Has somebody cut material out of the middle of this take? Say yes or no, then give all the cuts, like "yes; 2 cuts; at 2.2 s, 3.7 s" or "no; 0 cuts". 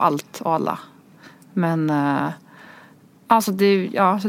no; 0 cuts